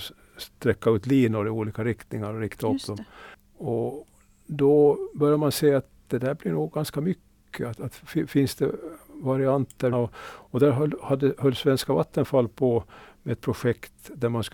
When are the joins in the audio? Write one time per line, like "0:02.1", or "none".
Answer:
0:09.9